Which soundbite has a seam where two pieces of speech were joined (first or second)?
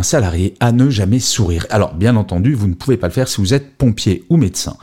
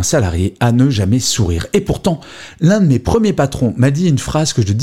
first